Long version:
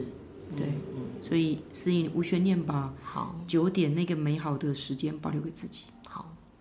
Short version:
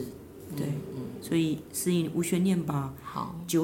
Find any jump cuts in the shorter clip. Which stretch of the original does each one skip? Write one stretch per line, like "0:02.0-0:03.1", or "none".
none